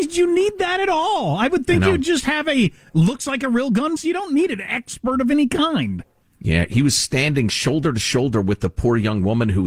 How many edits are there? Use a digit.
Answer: 1